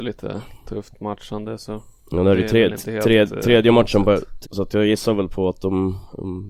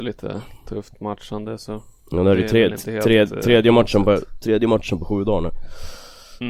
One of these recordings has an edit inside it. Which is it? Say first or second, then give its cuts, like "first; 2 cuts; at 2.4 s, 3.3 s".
first; 1 cut; at 4.4 s